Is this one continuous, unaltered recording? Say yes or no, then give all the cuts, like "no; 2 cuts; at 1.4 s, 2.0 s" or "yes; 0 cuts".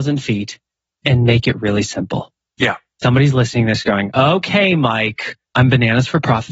no; 1 cut; at 5.4 s